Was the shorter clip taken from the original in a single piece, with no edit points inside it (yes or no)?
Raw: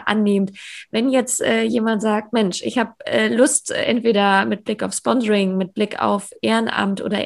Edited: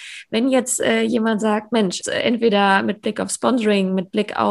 no